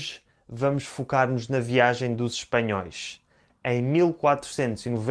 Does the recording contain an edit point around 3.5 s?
yes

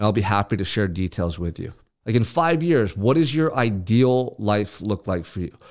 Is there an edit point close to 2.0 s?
yes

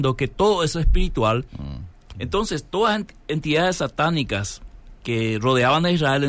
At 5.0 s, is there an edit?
no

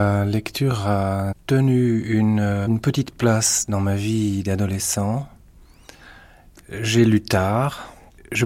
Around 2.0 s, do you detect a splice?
no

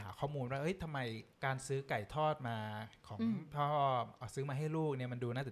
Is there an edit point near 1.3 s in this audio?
yes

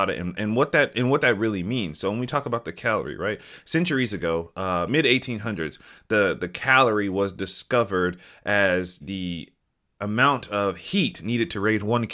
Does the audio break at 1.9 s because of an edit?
no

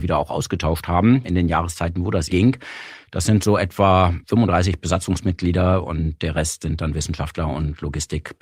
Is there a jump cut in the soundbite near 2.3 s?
yes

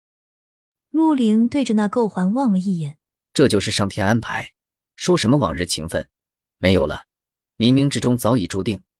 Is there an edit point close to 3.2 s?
yes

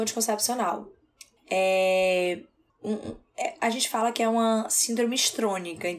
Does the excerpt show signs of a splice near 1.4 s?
yes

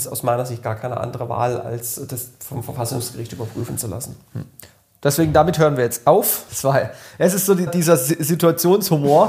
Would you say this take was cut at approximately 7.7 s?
yes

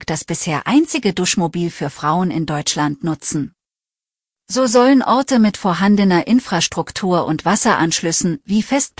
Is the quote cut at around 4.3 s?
yes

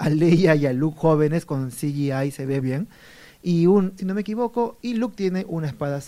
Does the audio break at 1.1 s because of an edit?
no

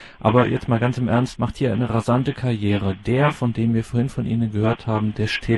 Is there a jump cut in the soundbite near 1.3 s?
yes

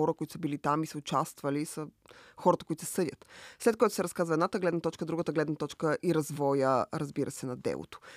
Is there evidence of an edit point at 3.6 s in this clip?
no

